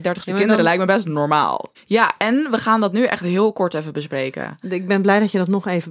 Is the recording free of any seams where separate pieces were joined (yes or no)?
no